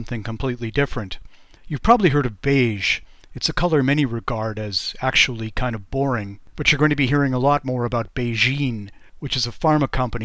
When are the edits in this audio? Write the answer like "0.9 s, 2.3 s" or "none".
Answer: none

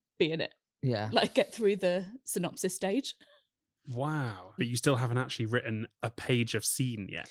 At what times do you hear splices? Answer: 4.6 s

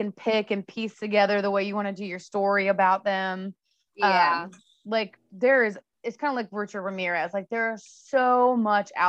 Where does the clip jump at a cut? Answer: none

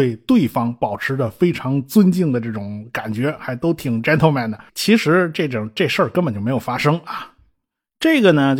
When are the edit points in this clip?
4.7 s

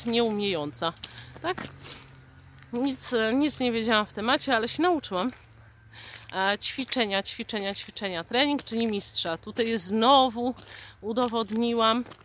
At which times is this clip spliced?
none

